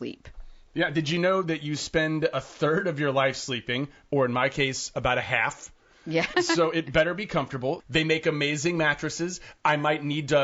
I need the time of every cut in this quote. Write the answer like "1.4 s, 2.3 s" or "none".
6.3 s, 7.8 s